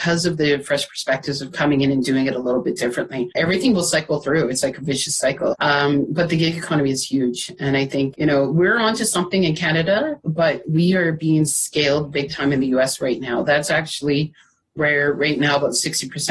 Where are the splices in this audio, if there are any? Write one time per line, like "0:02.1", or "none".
0:05.5